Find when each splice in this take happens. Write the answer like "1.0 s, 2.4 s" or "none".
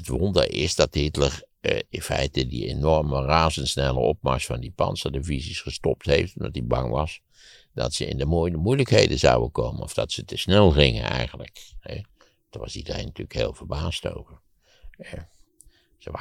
2.5 s